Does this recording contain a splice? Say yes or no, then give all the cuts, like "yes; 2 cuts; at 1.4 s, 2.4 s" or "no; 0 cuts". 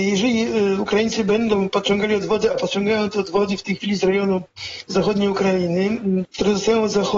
yes; 1 cut; at 6.2 s